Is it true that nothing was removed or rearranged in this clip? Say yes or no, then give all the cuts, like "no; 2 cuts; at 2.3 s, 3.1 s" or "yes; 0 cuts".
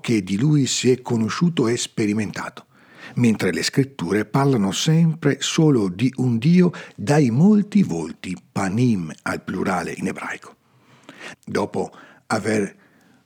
no; 1 cut; at 11.3 s